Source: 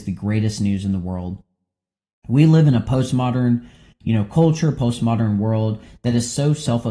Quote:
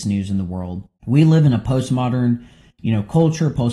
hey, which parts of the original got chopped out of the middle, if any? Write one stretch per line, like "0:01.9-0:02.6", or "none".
0:01.5-0:02.2